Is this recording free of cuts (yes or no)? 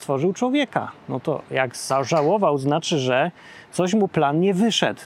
yes